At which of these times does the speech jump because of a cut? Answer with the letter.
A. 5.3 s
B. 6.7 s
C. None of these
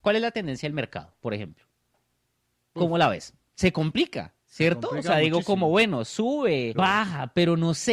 B